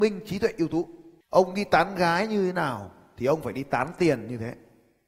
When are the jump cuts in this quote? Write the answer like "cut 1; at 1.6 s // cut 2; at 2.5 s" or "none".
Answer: cut 1; at 1.2 s